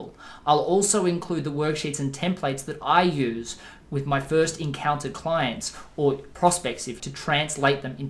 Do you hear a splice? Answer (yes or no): yes